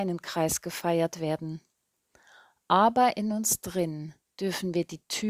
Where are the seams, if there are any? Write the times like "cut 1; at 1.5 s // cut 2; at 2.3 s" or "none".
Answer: none